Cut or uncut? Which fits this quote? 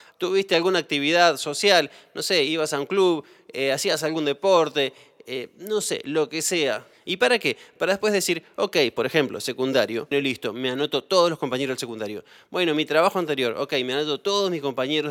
cut